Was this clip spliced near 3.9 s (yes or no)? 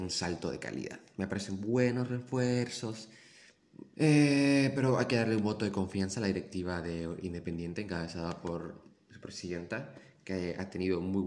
yes